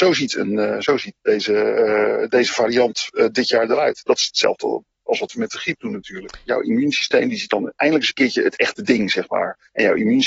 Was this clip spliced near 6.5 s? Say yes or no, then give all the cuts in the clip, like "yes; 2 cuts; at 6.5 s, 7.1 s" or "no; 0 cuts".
yes; 1 cut; at 6.5 s